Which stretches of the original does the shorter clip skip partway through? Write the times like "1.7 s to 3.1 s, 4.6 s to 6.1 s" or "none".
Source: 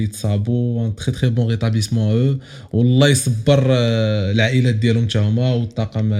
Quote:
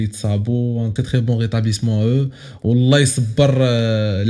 1.0 s to 1.0 s